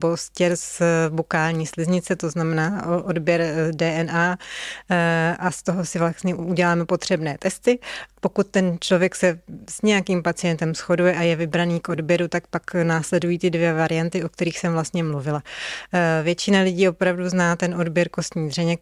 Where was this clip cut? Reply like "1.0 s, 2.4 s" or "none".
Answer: none